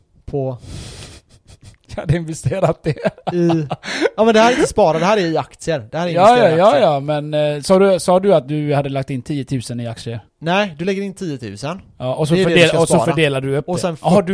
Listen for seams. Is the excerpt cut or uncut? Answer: cut